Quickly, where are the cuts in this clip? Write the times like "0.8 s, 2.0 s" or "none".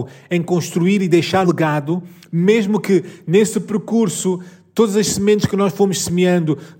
1.4 s